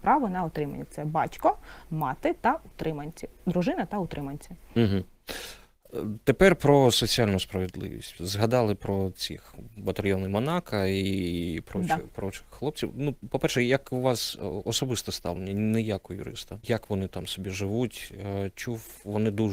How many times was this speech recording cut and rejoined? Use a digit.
1